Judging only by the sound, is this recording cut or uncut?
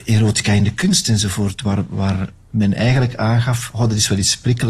uncut